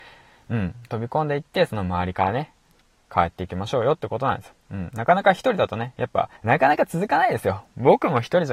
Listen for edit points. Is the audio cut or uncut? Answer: cut